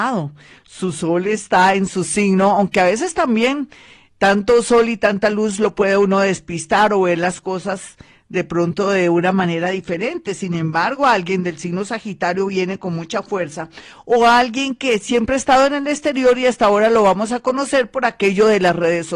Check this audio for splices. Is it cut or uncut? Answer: uncut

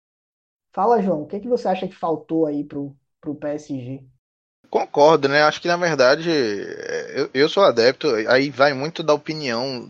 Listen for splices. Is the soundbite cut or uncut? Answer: uncut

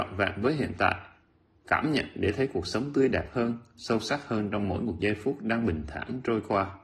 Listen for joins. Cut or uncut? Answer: uncut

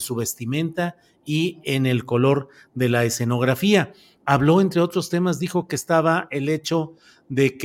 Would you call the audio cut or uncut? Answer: uncut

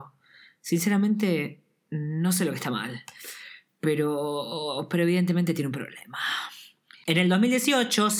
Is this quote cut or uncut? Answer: uncut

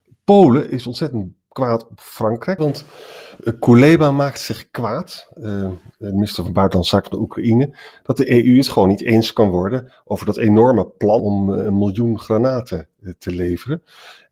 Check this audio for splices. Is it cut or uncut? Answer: cut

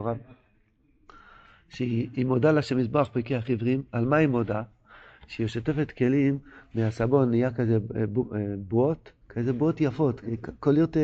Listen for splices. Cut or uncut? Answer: cut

